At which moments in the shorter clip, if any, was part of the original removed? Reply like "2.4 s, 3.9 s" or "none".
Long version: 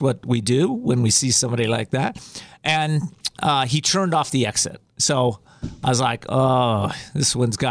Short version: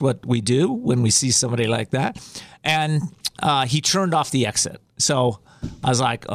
none